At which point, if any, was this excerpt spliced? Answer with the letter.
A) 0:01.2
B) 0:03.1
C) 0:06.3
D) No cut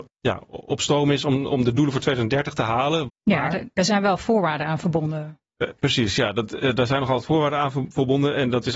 B